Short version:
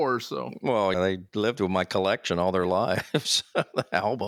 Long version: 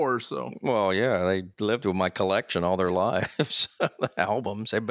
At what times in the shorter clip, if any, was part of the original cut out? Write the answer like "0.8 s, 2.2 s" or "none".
0.9 s